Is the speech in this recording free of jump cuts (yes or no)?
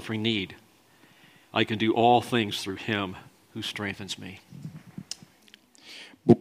yes